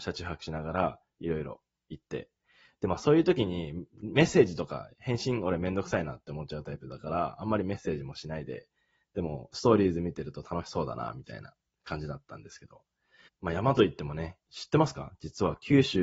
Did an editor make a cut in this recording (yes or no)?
yes